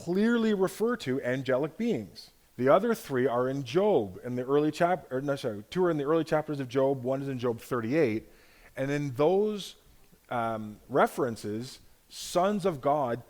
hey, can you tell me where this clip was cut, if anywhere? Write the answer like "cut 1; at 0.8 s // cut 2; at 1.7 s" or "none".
cut 1; at 2.4 s